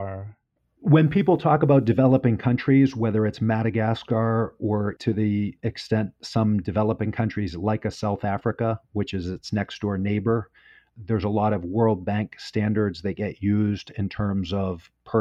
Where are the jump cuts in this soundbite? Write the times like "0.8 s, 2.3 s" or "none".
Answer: 5.0 s